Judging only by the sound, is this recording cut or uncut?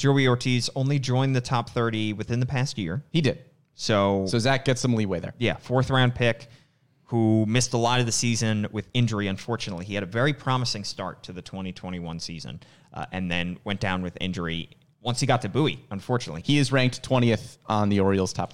cut